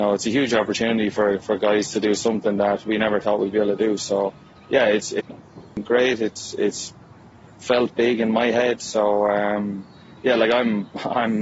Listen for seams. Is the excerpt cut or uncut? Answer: uncut